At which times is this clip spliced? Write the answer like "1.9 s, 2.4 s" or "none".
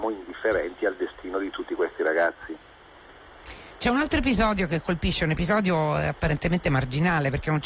none